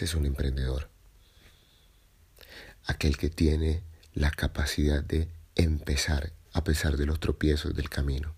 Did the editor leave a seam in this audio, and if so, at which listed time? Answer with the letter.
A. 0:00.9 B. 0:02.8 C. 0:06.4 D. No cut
C